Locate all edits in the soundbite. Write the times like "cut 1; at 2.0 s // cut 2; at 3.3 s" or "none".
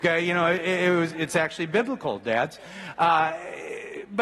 none